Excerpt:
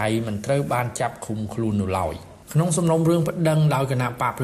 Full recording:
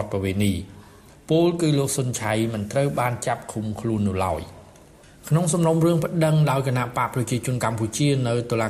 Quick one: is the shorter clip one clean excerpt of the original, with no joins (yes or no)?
no